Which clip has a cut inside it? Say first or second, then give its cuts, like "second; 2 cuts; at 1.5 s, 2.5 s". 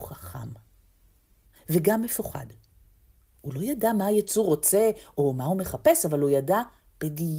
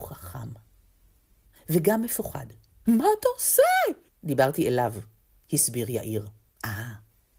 second; 2 cuts; at 2.9 s, 4.1 s